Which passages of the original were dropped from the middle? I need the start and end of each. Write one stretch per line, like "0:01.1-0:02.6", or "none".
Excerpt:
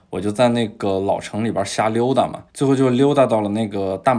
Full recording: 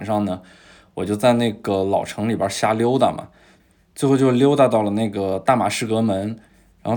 0:03.3-0:03.9